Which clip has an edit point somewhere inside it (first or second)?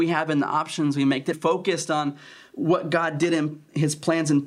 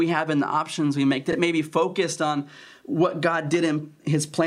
first